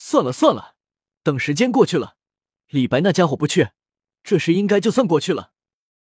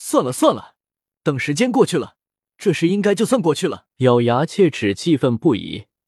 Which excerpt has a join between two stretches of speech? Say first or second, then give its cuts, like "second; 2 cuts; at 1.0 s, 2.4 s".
second; 2 cuts; at 2.4 s, 3.9 s